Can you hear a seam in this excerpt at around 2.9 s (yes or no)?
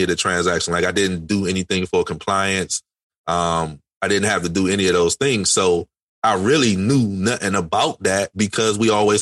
no